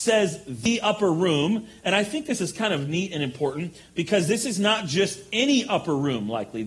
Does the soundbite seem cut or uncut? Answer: uncut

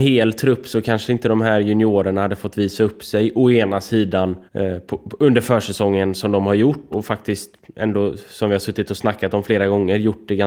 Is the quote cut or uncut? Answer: cut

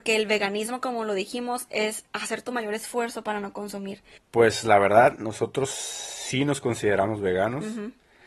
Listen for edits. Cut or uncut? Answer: cut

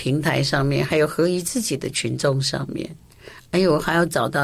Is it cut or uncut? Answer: uncut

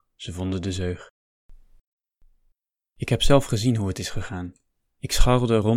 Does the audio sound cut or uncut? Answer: uncut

